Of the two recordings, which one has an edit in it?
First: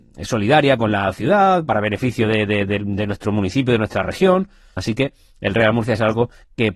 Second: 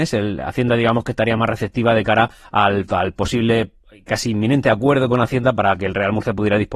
first; 1 cut; at 4.8 s

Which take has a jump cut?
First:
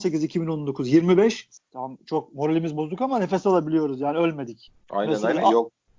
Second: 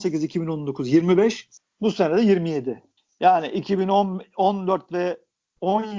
first; 1 cut; at 1.7 s

